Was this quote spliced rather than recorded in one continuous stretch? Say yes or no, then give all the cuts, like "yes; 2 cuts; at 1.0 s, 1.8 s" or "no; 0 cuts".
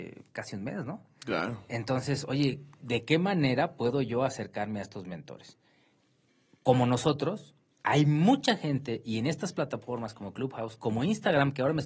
no; 0 cuts